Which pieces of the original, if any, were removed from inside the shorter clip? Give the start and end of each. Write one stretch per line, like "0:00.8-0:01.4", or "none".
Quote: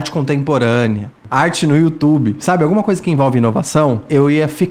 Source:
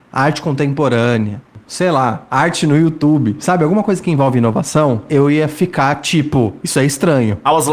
0:01.6-0:02.3